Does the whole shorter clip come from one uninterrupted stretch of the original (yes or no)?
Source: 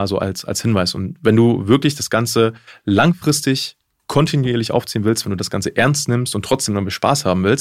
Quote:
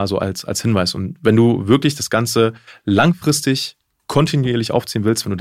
yes